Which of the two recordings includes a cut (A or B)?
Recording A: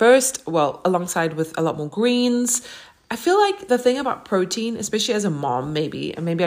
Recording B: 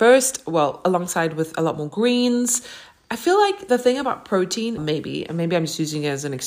B